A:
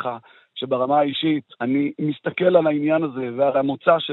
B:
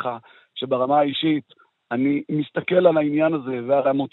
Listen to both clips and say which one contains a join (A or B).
A